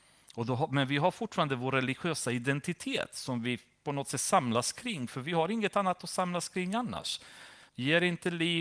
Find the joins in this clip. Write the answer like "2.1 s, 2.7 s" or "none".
7.7 s